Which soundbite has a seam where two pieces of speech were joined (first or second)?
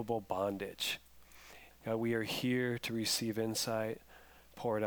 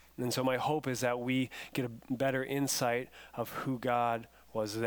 first